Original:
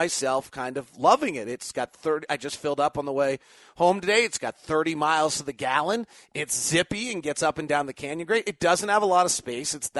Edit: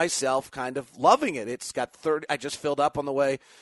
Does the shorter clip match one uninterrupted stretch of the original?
yes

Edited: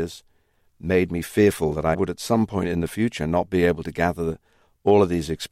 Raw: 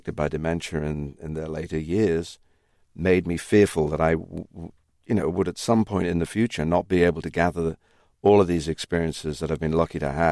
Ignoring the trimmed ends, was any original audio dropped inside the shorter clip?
yes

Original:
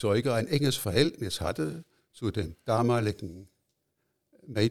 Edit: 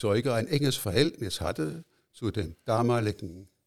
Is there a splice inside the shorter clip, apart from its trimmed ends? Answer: no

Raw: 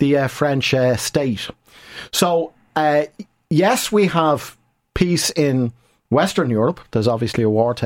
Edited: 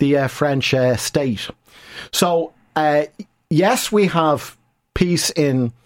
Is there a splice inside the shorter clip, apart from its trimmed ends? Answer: no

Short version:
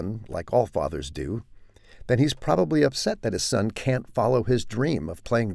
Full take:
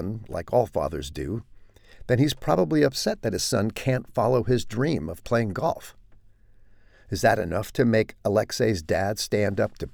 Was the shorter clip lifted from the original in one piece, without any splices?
yes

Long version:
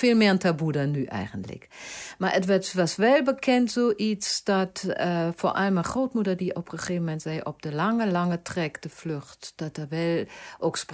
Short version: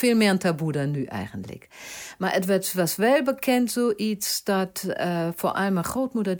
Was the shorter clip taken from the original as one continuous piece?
yes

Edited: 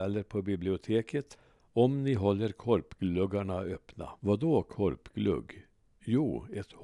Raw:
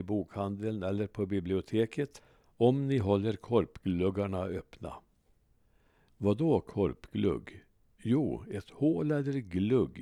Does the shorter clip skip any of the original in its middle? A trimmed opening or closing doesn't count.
yes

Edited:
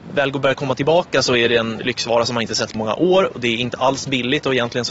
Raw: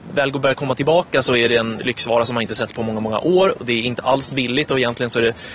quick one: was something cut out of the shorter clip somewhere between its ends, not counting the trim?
yes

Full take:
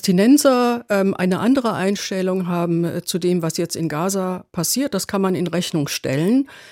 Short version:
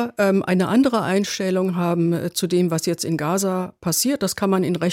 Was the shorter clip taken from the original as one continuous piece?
yes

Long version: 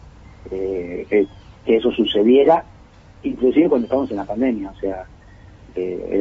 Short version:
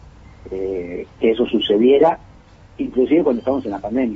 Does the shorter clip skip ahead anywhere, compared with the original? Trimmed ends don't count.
yes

